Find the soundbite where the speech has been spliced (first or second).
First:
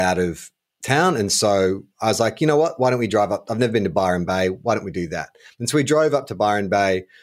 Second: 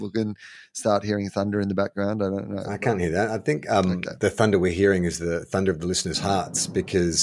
first